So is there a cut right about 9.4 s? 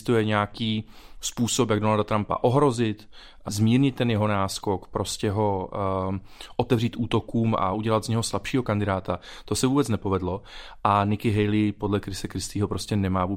no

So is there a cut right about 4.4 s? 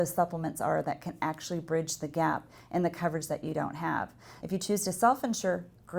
yes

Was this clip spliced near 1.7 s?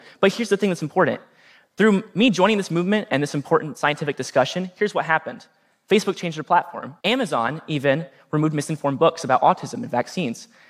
no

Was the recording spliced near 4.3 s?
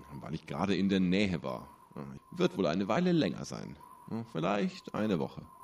no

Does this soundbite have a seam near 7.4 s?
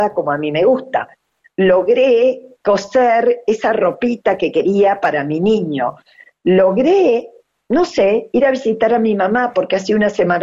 no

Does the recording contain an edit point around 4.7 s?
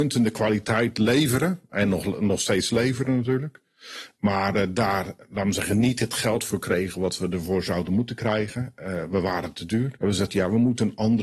no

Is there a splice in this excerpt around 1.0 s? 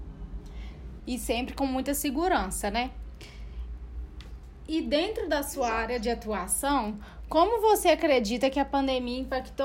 yes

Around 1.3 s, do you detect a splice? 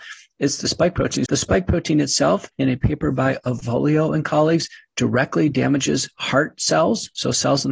yes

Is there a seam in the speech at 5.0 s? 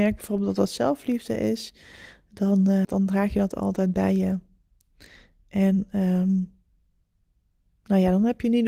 no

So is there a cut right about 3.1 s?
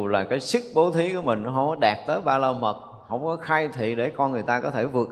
yes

